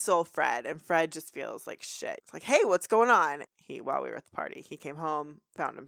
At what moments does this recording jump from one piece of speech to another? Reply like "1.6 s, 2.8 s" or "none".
2.2 s, 3.5 s